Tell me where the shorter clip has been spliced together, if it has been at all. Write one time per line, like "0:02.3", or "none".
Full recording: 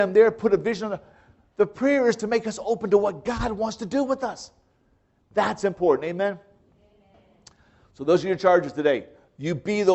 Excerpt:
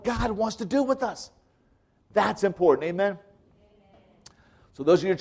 none